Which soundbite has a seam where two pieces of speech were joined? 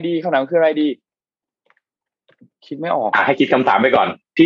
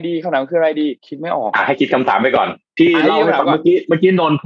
second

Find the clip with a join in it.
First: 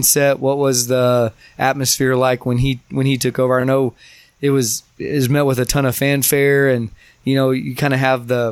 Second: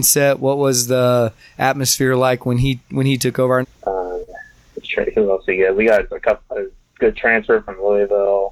second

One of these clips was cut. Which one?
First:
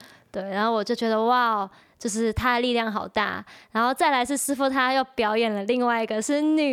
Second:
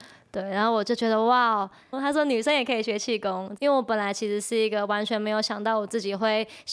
second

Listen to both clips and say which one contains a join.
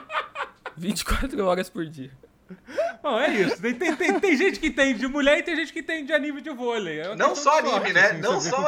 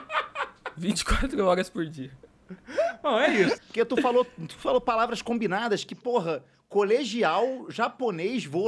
second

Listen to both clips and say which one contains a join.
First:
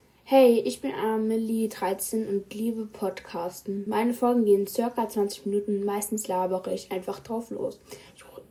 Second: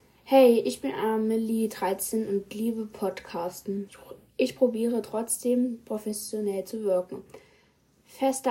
second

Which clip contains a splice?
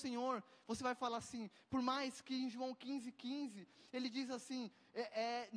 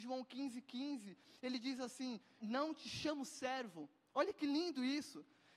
second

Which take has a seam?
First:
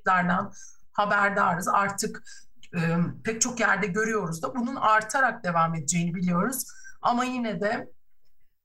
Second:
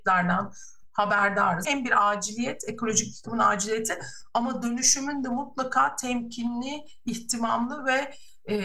second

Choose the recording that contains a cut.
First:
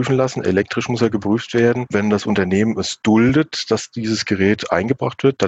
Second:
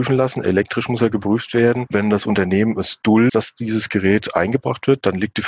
second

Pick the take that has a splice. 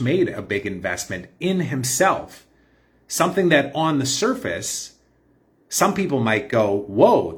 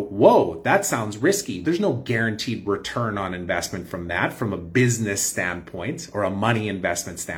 second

